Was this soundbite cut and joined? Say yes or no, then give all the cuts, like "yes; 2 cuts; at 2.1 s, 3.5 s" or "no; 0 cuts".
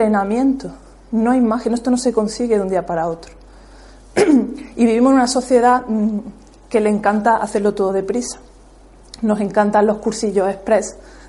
no; 0 cuts